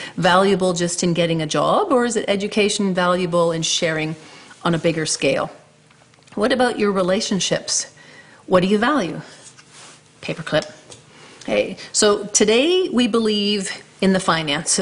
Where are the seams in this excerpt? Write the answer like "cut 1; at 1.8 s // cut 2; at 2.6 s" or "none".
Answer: none